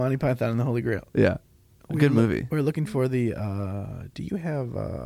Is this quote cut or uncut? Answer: uncut